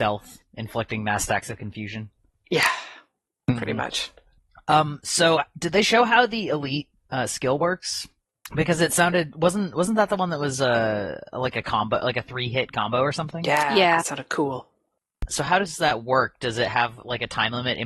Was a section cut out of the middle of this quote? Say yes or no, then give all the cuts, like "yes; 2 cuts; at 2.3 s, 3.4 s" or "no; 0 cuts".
no; 0 cuts